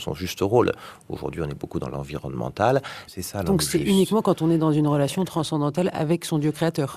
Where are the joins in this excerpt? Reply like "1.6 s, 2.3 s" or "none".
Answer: 3.1 s

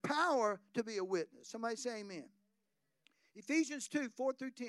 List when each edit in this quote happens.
none

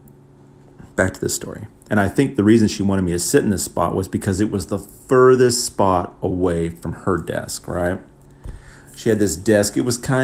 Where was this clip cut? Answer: 1.9 s

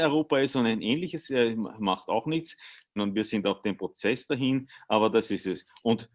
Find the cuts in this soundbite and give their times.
3.0 s

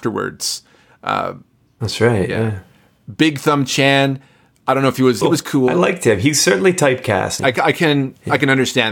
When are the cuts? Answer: 5.2 s, 7.4 s

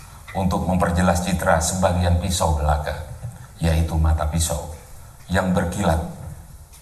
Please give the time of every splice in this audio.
none

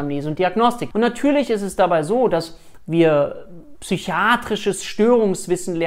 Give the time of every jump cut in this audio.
0.9 s

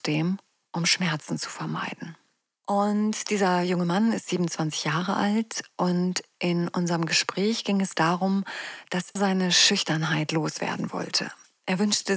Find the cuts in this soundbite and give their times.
2.6 s, 9.2 s

